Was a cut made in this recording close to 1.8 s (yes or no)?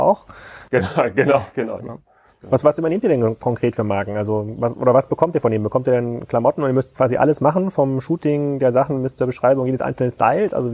yes